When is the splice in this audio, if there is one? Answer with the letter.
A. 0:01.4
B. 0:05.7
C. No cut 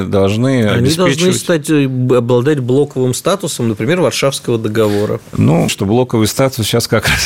B